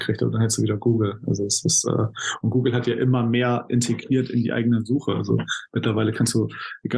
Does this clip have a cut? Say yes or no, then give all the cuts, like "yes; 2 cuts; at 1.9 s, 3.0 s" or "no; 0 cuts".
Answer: no; 0 cuts